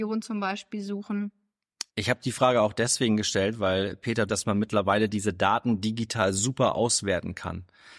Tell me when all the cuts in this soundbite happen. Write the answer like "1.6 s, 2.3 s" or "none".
1.9 s, 4.3 s